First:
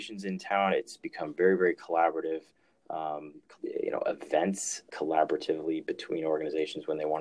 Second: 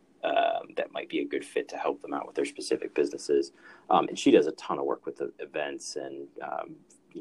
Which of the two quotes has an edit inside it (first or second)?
first